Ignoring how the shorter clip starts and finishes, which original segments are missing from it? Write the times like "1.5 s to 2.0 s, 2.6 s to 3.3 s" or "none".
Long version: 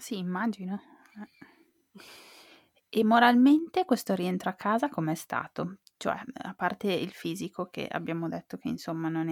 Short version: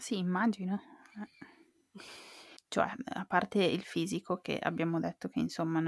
2.6 s to 5.9 s